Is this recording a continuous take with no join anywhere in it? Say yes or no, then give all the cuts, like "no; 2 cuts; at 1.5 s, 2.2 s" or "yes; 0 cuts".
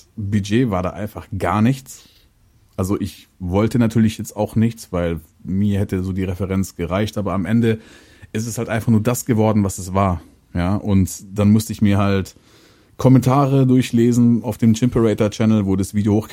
yes; 0 cuts